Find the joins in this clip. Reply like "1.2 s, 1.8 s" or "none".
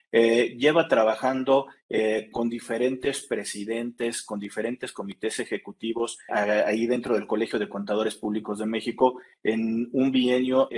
6.3 s